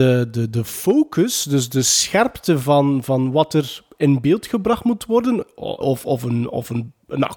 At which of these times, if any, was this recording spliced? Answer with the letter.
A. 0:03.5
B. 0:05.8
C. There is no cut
B